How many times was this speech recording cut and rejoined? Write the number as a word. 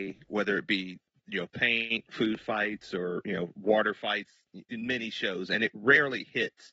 zero